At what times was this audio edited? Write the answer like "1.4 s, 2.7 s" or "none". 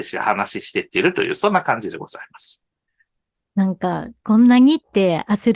none